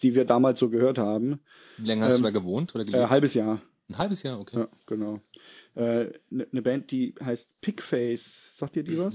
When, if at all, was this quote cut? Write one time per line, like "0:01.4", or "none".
none